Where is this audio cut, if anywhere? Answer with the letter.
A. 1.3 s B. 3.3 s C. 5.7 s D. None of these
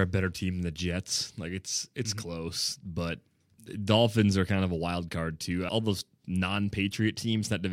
C